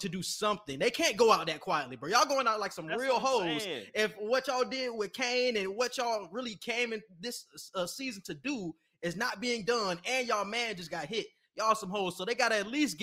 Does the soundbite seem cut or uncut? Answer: uncut